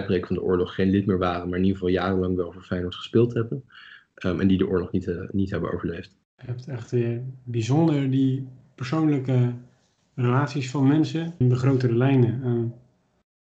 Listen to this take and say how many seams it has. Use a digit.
2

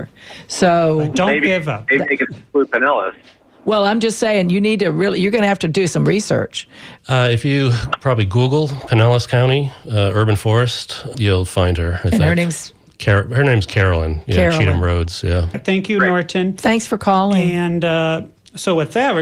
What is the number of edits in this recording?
3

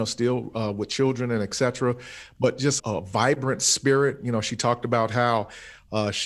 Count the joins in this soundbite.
1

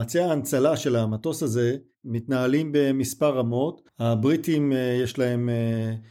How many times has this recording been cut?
1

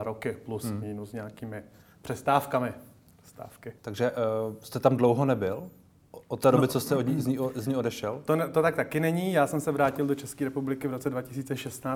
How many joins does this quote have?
1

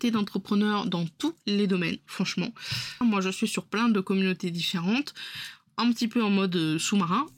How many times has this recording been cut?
1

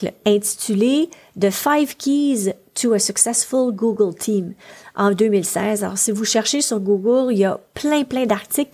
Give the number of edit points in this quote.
0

